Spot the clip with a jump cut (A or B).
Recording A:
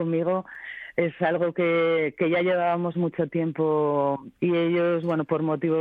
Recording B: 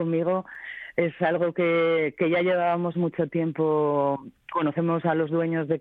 A